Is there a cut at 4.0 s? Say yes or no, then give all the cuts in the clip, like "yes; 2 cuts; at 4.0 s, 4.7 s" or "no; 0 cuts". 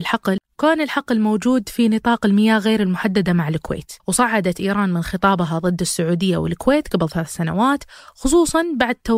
yes; 1 cut; at 4.0 s